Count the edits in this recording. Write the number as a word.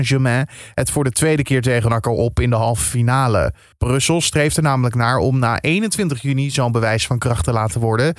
one